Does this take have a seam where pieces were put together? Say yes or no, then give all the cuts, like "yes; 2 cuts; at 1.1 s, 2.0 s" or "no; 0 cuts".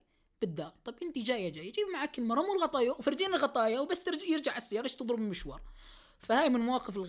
no; 0 cuts